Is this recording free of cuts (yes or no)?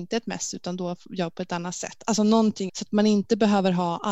no